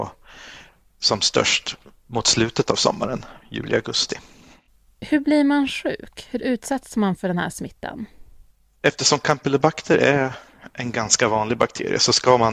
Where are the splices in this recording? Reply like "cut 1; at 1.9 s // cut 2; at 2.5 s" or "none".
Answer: none